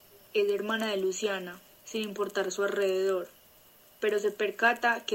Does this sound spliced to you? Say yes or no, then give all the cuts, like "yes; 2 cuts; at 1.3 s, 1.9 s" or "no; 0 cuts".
yes; 1 cut; at 1.7 s